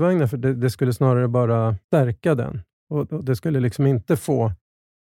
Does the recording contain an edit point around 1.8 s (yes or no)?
yes